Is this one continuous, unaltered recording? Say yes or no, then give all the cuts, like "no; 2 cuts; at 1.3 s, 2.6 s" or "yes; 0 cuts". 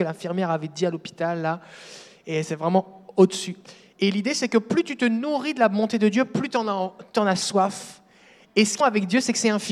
no; 1 cut; at 8.8 s